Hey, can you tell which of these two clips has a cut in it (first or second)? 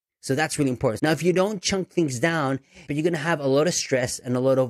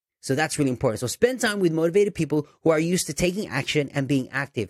first